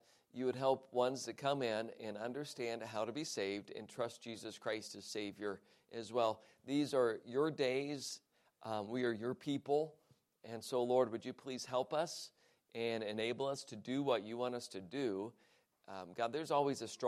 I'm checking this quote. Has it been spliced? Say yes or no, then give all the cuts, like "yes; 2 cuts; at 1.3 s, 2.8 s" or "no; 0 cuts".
no; 0 cuts